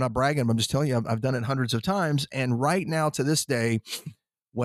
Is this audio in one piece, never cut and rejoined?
yes; 0 cuts

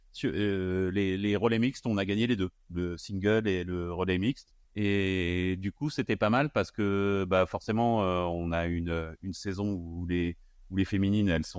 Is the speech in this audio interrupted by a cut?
yes; 1 cut; at 4.6 s

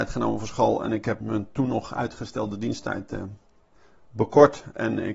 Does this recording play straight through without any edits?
no; 1 cut; at 1.2 s

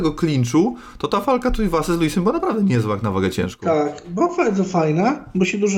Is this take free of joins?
yes; 0 cuts

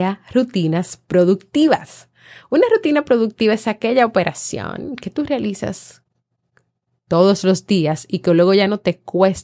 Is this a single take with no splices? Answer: yes; 0 cuts

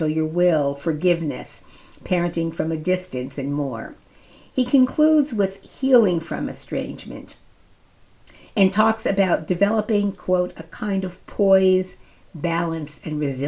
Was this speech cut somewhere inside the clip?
no; 0 cuts

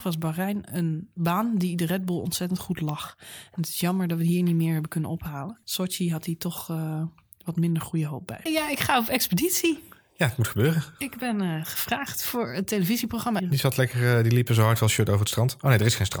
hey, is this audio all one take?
no; 3 cuts; at 5.6 s, 8.5 s, 13.4 s

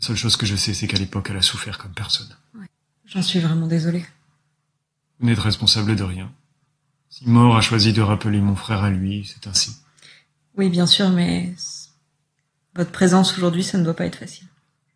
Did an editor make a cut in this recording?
no; 0 cuts

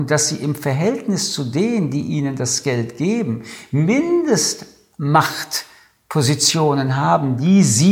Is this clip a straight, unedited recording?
yes; 0 cuts

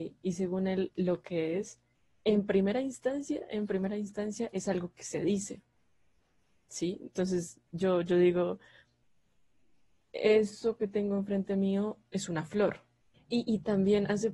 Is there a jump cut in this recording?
yes; 1 cut; at 13.1 s

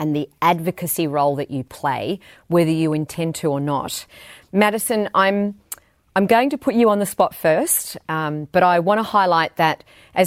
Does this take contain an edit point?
no; 0 cuts

